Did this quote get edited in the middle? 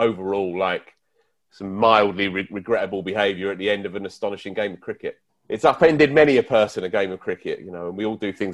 yes; 1 cut; at 5.3 s

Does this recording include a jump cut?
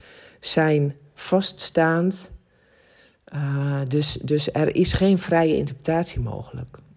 no; 0 cuts

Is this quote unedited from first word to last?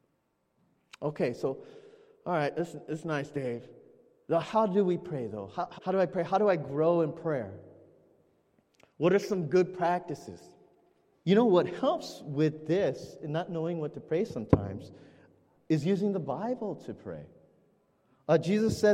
no; 3 cuts; at 4.4 s, 5.8 s, 11.2 s

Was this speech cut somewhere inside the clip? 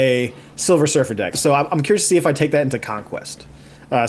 yes; 1 cut; at 1.3 s

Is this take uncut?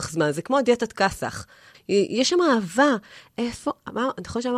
no; 1 cut; at 1.7 s

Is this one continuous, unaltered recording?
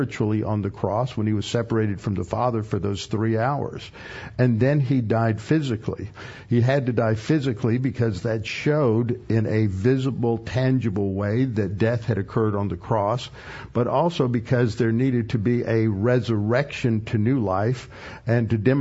yes; 0 cuts

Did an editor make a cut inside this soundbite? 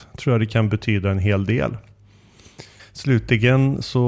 yes; 1 cut; at 2.8 s

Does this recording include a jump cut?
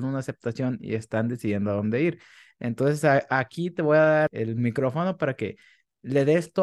no; 0 cuts

